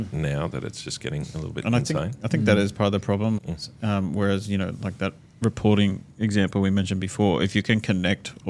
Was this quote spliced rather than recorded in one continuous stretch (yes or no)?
yes